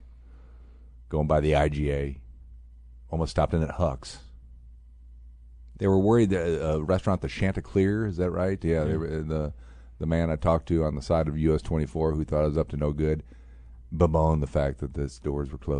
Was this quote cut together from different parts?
yes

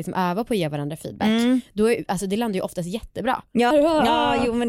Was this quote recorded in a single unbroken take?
no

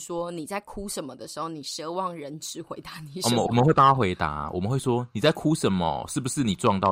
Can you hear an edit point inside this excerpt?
no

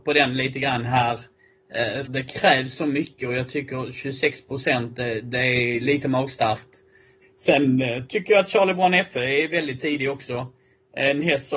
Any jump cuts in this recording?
yes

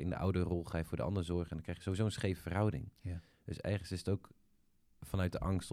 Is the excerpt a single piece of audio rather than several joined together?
no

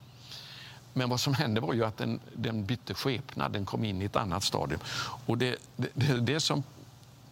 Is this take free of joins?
yes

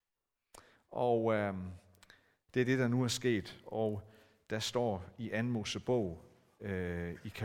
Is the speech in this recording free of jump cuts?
yes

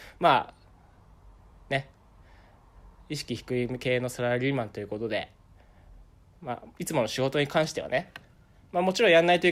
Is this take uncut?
yes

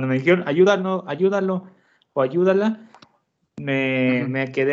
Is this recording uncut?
yes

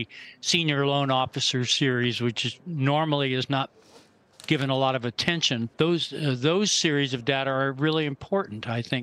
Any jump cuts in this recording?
yes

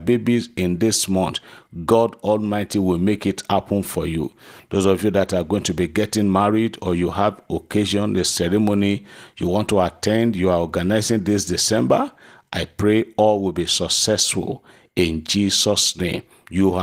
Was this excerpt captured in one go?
yes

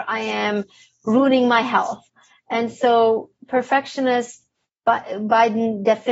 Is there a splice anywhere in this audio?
no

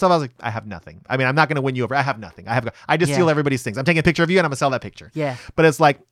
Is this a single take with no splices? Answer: yes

